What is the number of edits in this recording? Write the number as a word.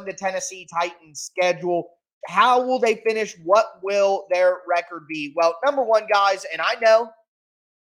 one